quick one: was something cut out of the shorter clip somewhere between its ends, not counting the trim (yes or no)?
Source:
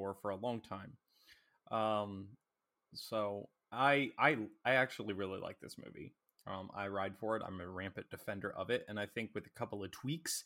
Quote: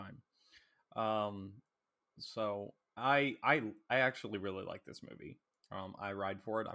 no